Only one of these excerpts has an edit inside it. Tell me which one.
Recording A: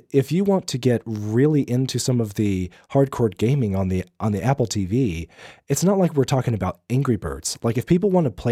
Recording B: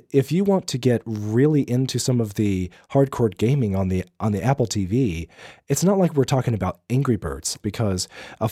B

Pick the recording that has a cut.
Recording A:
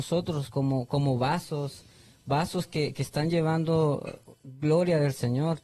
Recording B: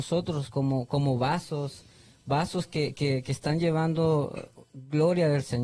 A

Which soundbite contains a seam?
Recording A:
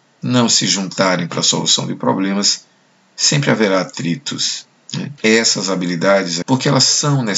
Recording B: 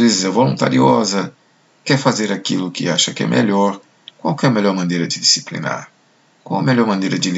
A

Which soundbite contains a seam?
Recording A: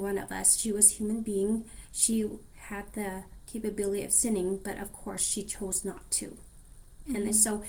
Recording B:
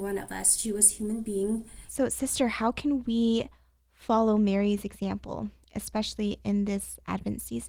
B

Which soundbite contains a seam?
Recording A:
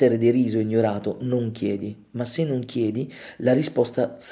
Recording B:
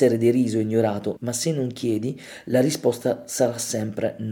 B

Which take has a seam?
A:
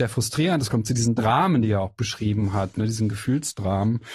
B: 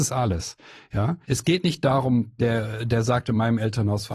B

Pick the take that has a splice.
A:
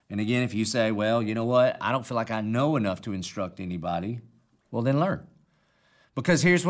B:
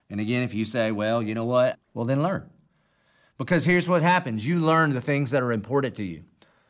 B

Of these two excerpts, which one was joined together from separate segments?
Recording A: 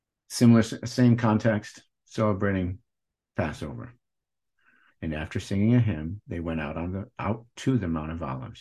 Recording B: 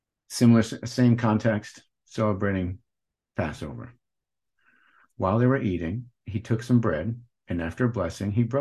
A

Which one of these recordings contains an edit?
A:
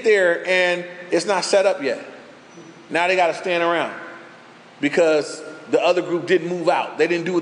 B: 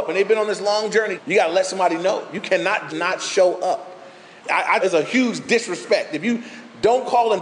B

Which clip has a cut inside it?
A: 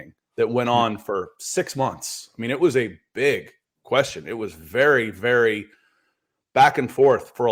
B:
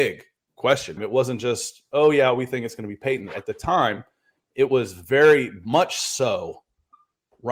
B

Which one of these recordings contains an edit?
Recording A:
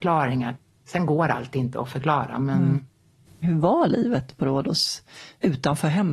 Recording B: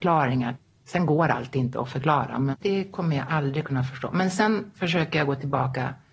B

